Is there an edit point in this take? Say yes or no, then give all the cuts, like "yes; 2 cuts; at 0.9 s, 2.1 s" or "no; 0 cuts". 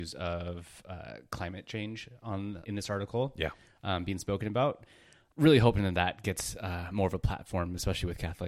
yes; 1 cut; at 2.6 s